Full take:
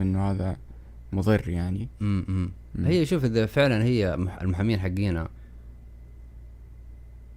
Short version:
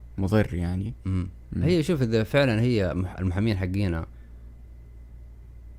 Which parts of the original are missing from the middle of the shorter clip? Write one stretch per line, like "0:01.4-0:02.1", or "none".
0:02.0-0:02.3